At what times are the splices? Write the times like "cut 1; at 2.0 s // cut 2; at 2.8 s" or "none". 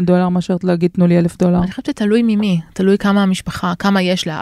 none